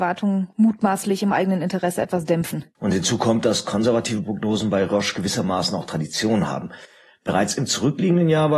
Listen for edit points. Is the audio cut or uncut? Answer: uncut